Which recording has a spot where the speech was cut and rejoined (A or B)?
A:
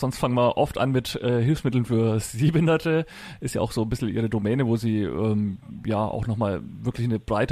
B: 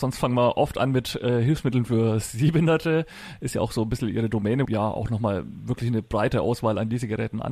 B